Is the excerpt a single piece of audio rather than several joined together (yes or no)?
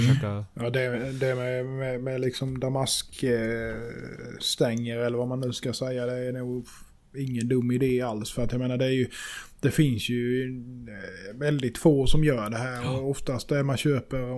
yes